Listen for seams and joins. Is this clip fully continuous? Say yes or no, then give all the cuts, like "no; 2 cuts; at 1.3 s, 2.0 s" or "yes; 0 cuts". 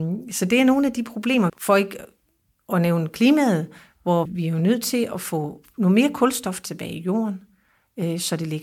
no; 2 cuts; at 1.5 s, 4.3 s